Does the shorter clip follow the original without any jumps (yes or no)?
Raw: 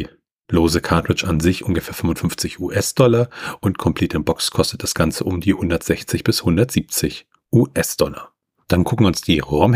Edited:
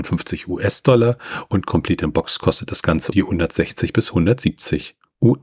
no